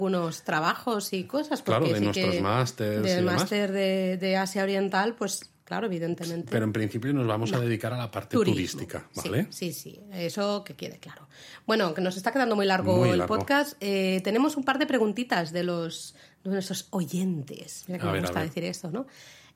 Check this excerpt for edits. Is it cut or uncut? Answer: uncut